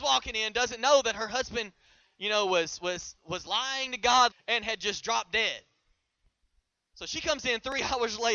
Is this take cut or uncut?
cut